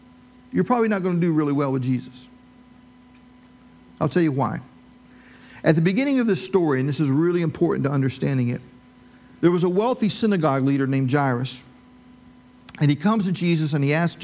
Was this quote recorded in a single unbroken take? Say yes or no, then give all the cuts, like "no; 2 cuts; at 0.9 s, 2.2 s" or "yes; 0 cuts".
yes; 0 cuts